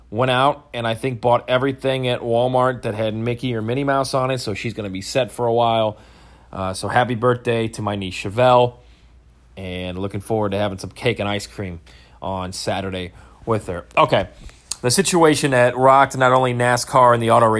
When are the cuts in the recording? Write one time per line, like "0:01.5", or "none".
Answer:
none